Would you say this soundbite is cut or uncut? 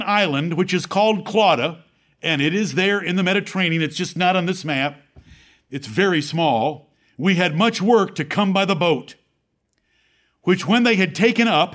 uncut